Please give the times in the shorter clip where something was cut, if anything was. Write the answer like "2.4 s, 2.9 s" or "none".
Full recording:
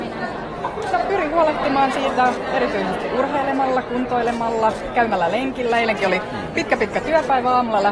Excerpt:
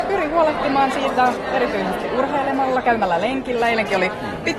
2.8 s